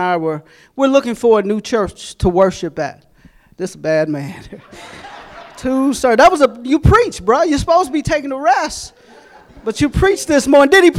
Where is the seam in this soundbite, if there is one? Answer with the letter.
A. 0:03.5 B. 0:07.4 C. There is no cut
A